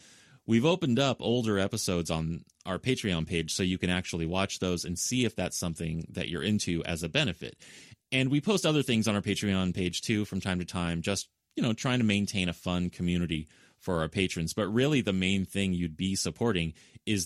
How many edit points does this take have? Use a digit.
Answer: 0